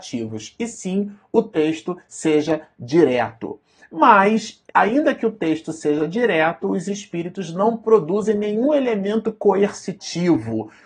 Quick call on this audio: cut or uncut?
cut